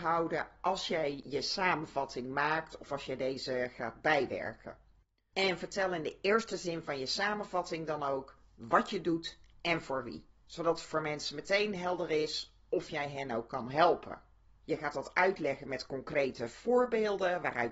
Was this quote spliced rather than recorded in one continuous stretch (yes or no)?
yes